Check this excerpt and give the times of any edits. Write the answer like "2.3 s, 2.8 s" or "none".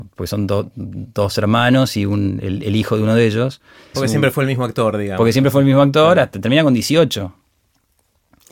3.9 s